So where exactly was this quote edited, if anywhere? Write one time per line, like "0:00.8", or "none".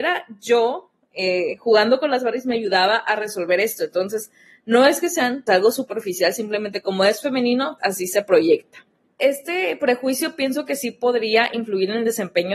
0:05.5
0:07.8